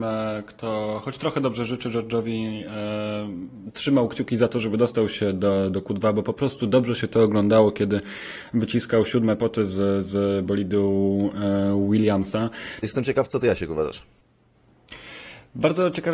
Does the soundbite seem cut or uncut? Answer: cut